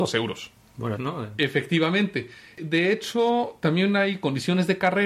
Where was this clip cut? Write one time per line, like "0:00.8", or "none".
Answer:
0:01.0